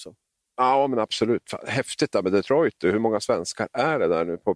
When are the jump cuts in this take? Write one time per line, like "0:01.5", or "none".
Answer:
none